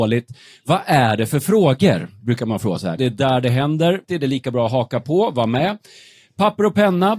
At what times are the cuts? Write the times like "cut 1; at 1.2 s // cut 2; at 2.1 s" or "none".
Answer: cut 1; at 3.0 s // cut 2; at 4.0 s

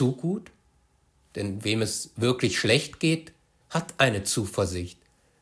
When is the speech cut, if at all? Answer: cut 1; at 3.6 s

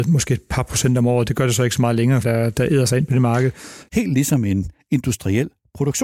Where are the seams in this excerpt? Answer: cut 1; at 2.2 s // cut 2; at 3.9 s

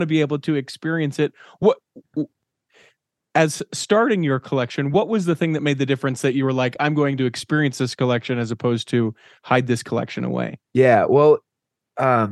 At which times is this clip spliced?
cut 1; at 10.7 s

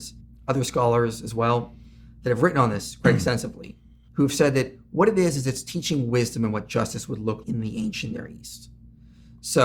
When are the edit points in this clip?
cut 1; at 7.4 s

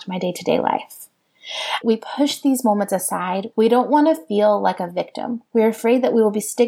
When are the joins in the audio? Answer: cut 1; at 1.8 s // cut 2; at 3.5 s

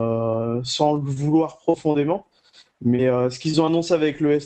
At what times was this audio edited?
none

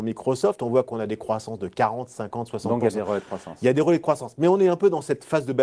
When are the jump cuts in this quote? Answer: none

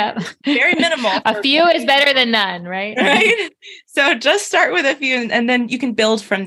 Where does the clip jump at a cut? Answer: none

